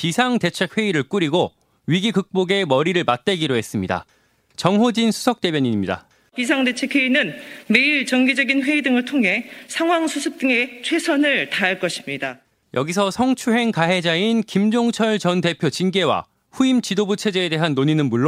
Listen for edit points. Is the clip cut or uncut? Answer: uncut